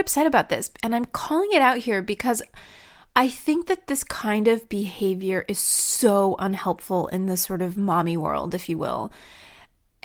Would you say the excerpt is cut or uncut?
uncut